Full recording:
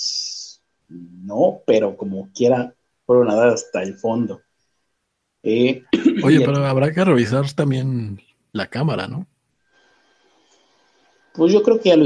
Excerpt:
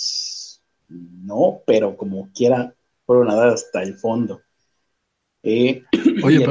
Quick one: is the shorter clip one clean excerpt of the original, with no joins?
yes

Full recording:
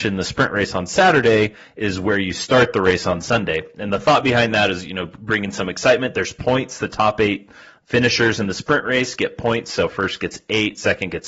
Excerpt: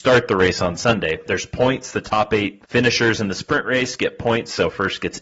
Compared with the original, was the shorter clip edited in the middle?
yes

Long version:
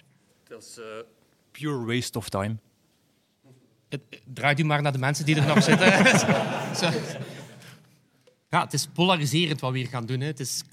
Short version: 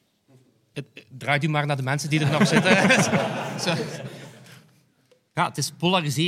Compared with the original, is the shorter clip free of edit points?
yes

